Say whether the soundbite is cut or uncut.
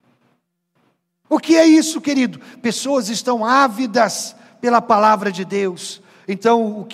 uncut